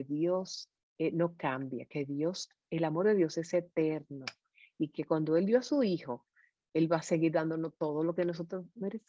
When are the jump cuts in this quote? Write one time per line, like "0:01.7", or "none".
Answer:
none